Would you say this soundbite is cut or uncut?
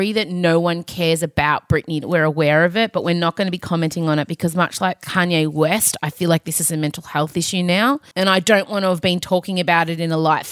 cut